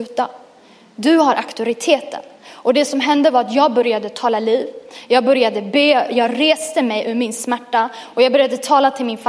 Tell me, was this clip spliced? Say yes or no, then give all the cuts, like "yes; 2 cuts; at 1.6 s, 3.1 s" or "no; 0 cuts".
no; 0 cuts